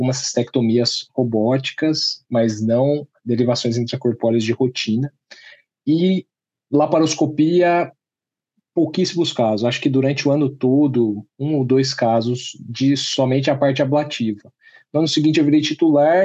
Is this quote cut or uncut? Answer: uncut